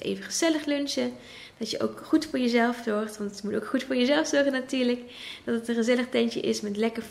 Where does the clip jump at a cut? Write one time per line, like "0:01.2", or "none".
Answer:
none